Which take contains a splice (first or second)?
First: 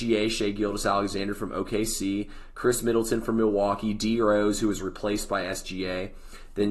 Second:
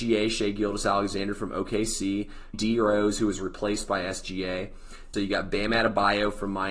second